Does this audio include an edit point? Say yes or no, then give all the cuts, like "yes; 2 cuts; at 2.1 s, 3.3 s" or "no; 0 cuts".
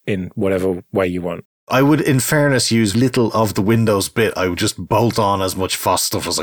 yes; 1 cut; at 2.9 s